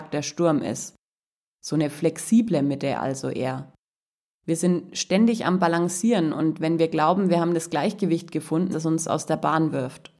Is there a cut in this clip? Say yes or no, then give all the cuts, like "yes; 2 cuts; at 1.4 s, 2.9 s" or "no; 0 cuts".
yes; 2 cuts; at 4.3 s, 8.7 s